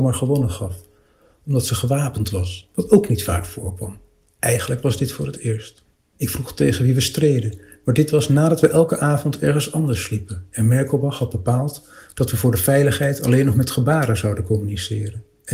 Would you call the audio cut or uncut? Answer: cut